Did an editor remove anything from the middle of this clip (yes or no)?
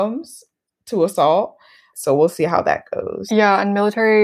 yes